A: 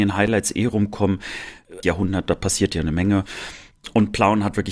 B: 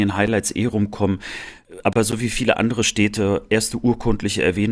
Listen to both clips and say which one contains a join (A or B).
A